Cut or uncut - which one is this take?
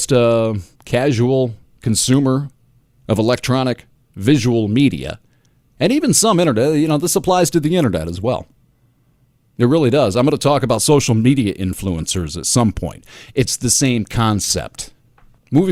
cut